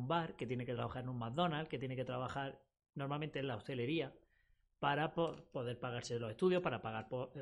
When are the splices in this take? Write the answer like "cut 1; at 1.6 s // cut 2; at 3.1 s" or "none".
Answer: none